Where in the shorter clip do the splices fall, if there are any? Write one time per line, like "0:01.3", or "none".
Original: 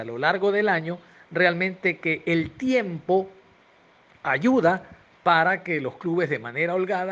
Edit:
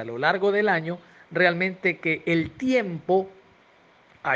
none